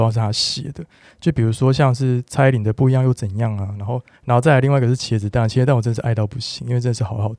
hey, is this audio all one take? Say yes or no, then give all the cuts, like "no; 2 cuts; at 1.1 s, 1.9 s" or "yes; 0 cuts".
no; 1 cut; at 4.1 s